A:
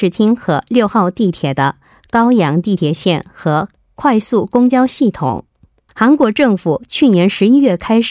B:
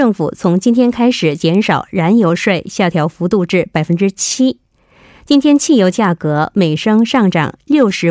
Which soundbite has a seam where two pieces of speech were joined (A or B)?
A